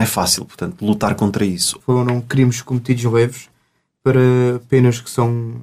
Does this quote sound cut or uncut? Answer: cut